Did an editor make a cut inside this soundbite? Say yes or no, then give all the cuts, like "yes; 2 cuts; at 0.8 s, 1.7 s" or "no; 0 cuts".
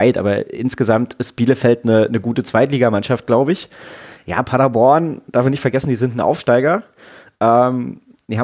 no; 0 cuts